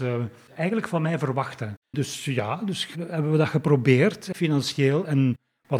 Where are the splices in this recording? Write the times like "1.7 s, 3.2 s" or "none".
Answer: 1.8 s, 2.9 s, 4.3 s